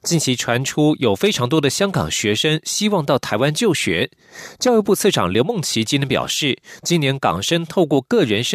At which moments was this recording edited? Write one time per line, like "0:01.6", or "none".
0:06.8